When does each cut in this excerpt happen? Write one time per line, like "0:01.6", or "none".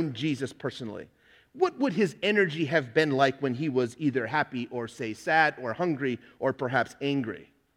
none